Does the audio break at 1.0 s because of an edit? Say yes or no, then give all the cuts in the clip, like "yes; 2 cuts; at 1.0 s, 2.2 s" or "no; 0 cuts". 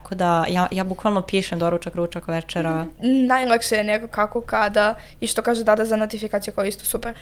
no; 2 cuts; at 2.9 s, 4.1 s